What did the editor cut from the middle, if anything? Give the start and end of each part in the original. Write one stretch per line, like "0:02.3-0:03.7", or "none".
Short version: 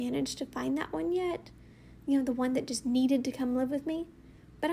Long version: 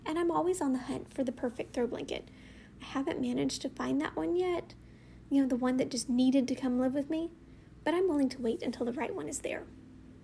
none